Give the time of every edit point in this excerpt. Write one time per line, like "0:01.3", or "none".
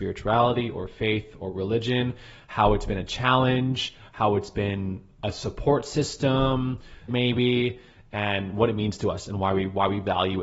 0:07.1